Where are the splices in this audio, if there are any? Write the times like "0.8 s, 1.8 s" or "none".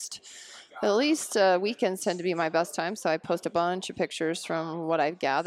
none